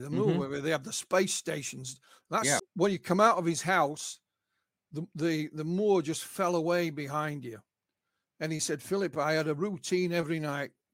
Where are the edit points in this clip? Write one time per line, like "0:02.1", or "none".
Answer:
0:02.6